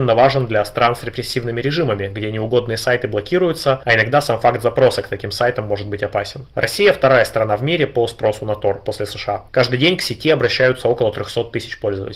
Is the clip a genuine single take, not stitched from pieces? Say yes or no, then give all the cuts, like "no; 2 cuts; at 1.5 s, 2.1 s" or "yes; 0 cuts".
yes; 0 cuts